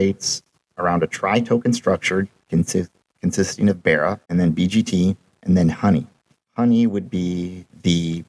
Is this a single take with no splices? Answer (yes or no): no